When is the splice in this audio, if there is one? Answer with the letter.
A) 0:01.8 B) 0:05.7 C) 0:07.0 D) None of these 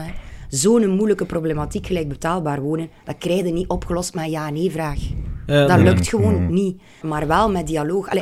C